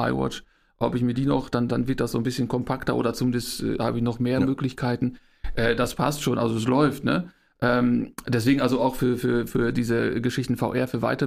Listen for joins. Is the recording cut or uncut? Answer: uncut